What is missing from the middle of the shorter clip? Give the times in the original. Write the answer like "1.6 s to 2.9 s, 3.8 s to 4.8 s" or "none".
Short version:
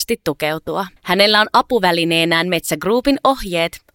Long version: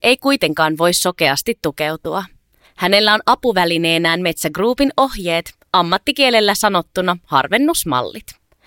2.3 s to 2.7 s